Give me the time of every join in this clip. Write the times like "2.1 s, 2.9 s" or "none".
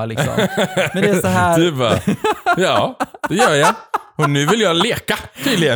none